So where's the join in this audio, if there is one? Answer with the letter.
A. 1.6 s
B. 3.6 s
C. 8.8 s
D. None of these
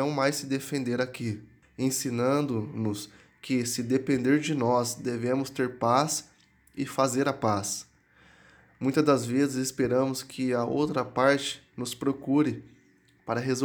A